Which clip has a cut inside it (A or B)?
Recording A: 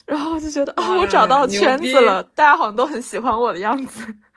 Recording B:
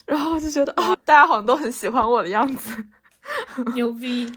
B